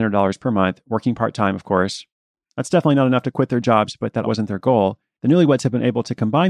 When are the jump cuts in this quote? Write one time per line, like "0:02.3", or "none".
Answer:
0:04.2